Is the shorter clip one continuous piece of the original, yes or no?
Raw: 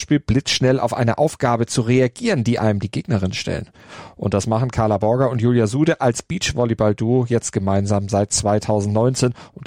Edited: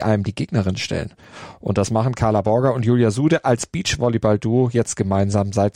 yes